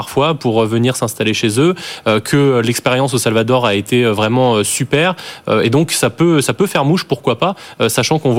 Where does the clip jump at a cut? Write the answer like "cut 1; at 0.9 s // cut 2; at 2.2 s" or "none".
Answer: none